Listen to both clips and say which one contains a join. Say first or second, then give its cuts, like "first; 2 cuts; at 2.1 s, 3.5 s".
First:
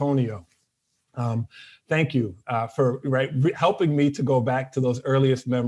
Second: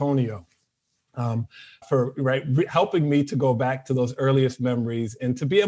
second; 1 cut; at 1.8 s